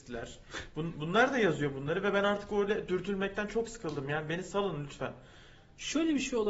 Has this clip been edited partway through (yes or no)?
no